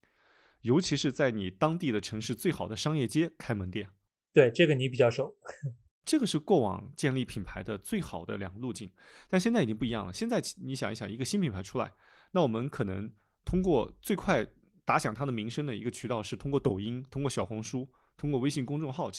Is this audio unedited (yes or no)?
yes